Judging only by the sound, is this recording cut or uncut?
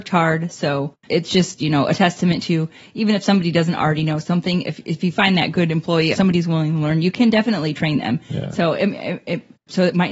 cut